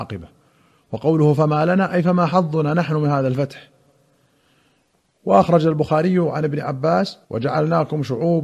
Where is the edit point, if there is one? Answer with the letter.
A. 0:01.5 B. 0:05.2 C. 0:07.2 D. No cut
C